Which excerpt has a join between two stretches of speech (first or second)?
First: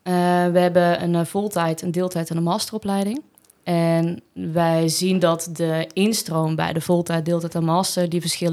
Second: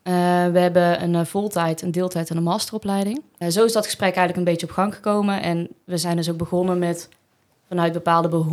second